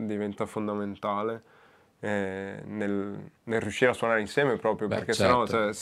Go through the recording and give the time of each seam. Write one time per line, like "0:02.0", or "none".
0:03.4